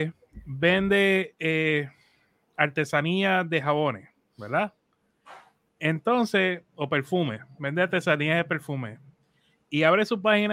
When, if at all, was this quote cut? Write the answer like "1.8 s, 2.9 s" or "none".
none